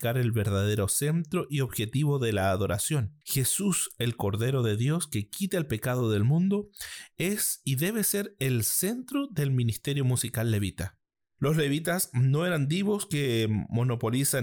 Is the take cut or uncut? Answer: uncut